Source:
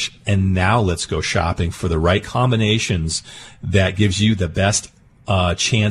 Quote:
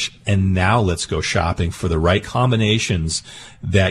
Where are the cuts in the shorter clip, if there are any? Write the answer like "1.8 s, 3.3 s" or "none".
none